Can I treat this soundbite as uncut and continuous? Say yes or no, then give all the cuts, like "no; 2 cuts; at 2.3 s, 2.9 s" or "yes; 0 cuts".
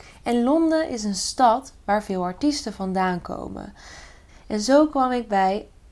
no; 1 cut; at 4.3 s